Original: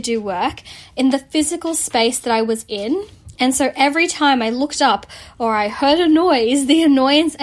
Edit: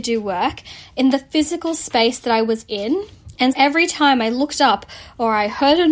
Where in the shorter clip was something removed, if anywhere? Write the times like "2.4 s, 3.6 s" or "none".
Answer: 3.5 s